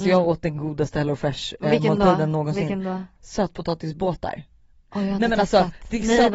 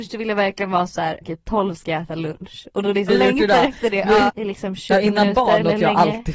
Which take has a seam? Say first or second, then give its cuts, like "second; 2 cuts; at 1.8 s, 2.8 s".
second; 3 cuts; at 1.2 s, 3.1 s, 4.3 s